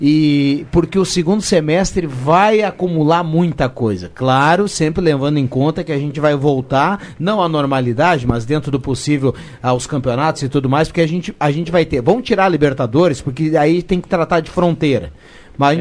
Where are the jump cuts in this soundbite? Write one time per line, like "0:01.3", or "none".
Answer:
none